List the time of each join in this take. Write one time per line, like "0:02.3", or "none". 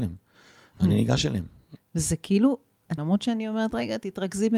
0:01.8
0:03.0